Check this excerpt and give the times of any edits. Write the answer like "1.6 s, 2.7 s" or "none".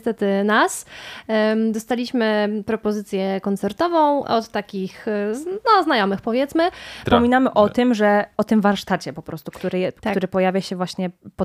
4.2 s, 7.1 s